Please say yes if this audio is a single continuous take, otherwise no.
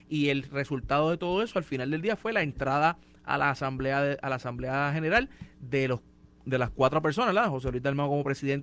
yes